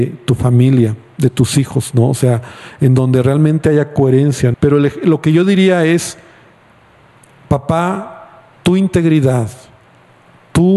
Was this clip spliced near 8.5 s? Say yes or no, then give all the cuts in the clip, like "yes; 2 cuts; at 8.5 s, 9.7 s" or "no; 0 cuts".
yes; 2 cuts; at 4.5 s, 8.5 s